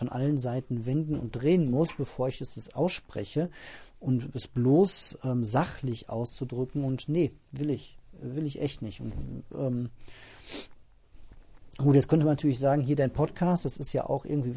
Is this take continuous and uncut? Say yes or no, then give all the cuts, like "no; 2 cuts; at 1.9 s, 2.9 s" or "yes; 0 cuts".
yes; 0 cuts